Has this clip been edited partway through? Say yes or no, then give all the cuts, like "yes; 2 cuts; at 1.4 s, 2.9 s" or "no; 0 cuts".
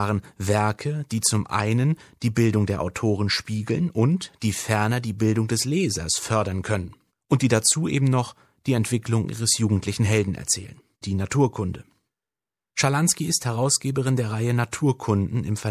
yes; 2 cuts; at 7.1 s, 11.0 s